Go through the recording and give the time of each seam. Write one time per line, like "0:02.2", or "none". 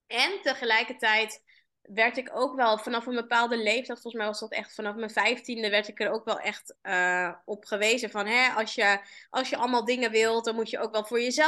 none